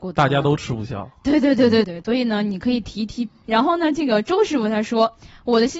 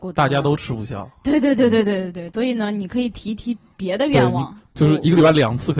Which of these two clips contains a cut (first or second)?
first